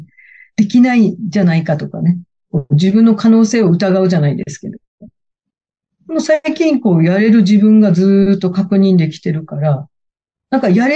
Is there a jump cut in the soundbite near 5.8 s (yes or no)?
no